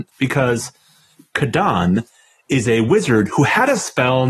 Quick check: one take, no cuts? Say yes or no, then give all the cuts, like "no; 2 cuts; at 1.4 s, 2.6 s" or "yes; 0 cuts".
yes; 0 cuts